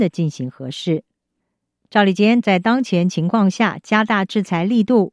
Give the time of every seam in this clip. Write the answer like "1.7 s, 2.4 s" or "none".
2.4 s